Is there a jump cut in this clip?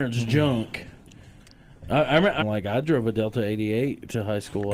yes; 1 cut; at 2.4 s

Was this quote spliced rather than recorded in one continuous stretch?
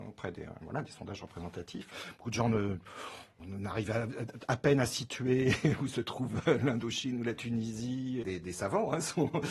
yes; 1 cut; at 8.2 s

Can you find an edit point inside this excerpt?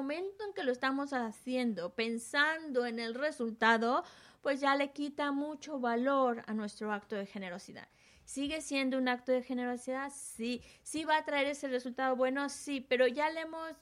no; 0 cuts

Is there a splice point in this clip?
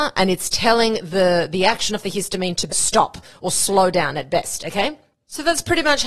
yes; 1 cut; at 2.7 s

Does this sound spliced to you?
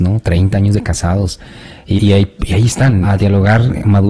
yes; 2 cuts; at 2.0 s, 3.0 s

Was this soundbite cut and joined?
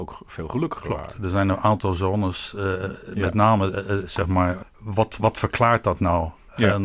yes; 1 cut; at 4.6 s

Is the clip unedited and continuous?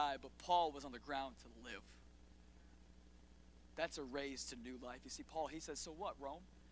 yes; 0 cuts

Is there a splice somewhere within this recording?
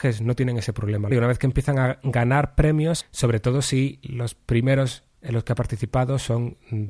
yes; 2 cuts; at 1.1 s, 3.0 s

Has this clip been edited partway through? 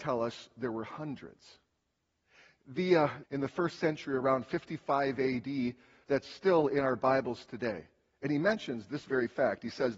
yes; 2 cuts; at 3.2 s, 6.0 s

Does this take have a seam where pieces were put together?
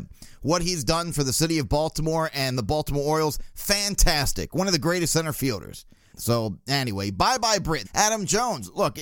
yes; 2 cuts; at 6.1 s, 7.8 s

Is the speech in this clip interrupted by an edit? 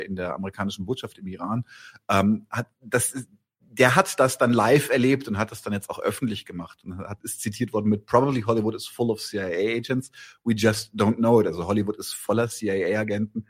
no; 0 cuts

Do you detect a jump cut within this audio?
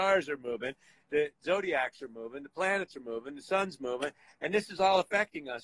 no; 0 cuts

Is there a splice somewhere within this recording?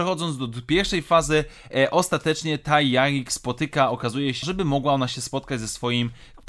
yes; 1 cut; at 4.4 s

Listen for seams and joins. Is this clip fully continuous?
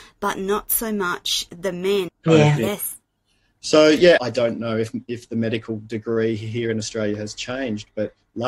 no; 2 cuts; at 2.1 s, 4.2 s

